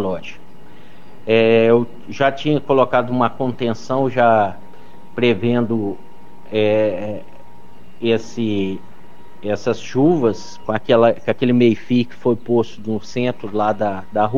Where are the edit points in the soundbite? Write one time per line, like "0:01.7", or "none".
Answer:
0:10.6